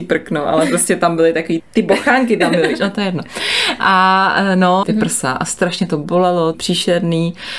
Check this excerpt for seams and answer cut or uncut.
cut